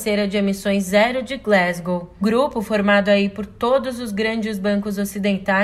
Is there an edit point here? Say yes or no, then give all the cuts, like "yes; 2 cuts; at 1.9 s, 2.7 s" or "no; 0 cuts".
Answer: yes; 1 cut; at 2.2 s